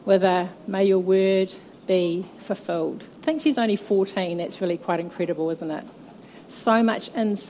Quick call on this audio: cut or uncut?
cut